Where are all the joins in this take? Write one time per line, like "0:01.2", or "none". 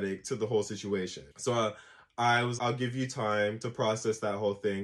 0:01.3
0:02.6